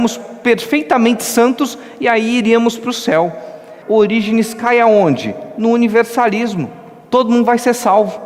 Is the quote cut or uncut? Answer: cut